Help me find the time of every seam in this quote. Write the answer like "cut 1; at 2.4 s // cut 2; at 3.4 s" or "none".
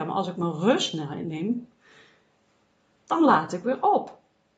none